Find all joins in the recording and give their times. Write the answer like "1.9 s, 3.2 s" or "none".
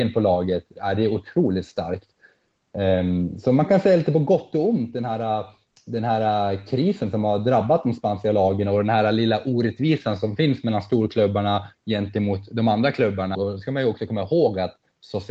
11.7 s, 13.3 s